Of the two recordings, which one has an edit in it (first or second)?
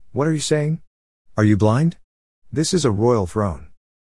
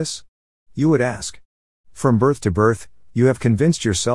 second